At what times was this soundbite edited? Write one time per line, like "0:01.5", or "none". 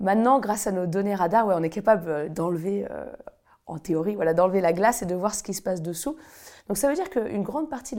0:06.6